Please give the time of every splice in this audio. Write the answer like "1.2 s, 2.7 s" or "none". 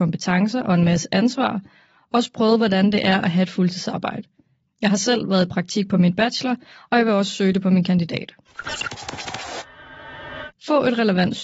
none